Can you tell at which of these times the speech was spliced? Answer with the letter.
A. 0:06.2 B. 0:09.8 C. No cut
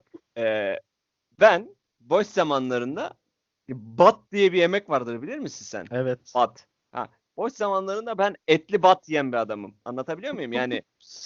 B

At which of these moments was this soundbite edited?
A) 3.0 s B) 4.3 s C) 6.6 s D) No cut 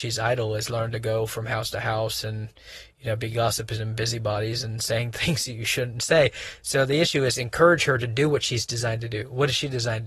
D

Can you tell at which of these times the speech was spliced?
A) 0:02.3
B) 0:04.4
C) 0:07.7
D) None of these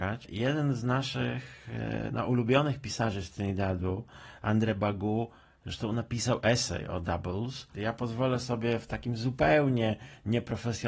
C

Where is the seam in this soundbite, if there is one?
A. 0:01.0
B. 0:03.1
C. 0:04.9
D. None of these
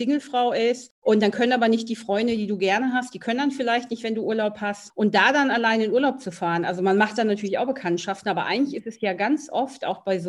A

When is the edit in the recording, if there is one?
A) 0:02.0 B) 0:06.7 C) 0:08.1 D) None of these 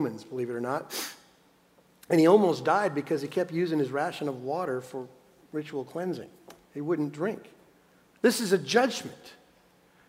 C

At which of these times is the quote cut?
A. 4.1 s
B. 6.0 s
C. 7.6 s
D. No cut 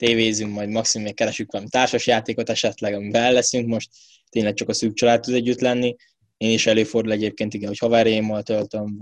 D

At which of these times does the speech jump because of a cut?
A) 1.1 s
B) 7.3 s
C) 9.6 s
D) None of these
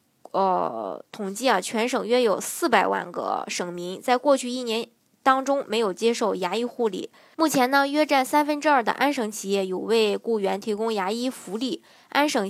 B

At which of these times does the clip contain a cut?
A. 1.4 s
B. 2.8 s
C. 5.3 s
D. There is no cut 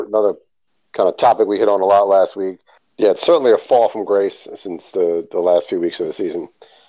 B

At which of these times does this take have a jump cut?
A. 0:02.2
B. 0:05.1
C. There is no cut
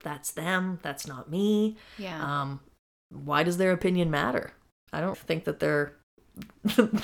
B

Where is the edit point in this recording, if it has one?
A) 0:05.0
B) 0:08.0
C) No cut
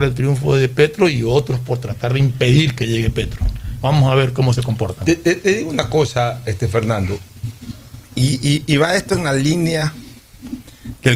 C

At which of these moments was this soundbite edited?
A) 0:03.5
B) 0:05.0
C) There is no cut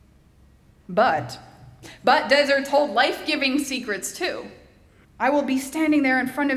B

